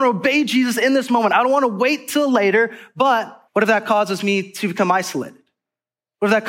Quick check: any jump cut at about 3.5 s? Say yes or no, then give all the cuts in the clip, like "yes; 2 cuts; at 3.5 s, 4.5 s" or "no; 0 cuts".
yes; 1 cut; at 3.5 s